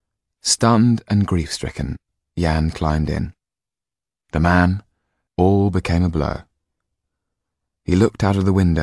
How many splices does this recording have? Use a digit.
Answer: 1